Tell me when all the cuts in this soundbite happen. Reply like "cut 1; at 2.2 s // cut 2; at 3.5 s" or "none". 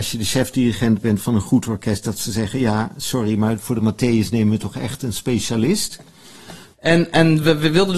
cut 1; at 6.7 s